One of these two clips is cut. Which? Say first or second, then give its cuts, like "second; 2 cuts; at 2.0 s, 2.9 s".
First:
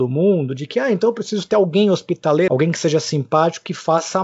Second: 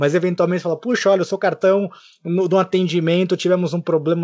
first; 1 cut; at 2.5 s